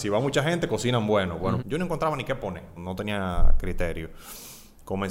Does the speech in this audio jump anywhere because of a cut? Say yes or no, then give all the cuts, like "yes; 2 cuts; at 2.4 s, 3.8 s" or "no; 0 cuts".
yes; 2 cuts; at 1.6 s, 2.8 s